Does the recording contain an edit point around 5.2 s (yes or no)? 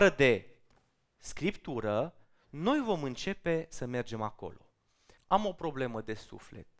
yes